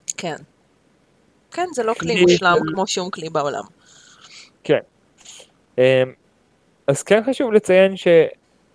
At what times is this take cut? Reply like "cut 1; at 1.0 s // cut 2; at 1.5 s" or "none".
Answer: none